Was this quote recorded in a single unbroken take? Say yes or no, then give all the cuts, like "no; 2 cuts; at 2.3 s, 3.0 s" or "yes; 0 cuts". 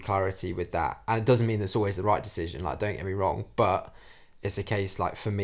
yes; 0 cuts